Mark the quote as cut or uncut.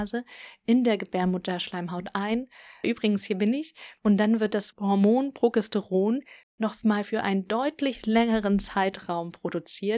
cut